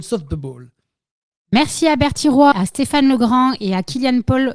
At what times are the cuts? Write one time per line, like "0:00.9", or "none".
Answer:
0:02.5